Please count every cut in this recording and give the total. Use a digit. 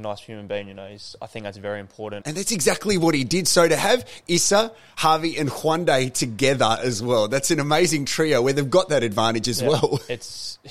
1